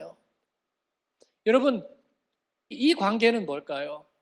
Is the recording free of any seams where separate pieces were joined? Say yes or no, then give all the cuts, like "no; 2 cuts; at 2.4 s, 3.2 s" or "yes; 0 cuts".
no; 1 cut; at 2.7 s